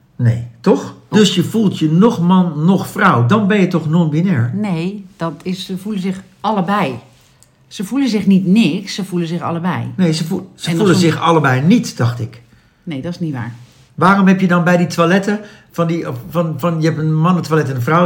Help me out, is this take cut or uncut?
cut